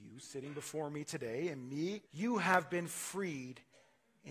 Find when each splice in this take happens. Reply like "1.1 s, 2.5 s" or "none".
2.1 s